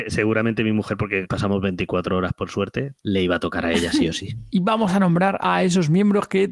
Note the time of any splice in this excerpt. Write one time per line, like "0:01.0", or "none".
0:01.2
0:02.9
0:04.5